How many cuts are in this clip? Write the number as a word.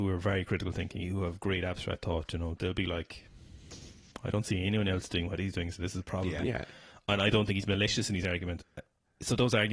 two